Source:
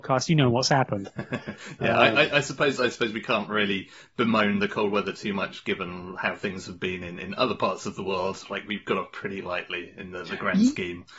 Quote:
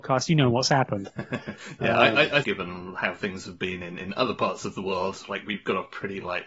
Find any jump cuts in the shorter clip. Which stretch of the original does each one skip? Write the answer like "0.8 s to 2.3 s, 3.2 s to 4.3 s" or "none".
2.4 s to 5.6 s